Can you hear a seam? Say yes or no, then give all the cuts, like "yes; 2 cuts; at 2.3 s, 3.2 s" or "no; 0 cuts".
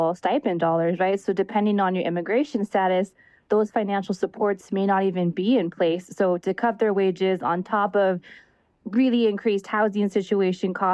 no; 0 cuts